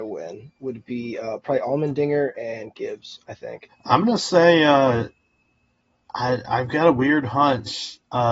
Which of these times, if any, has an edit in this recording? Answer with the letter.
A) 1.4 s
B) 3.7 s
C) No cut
B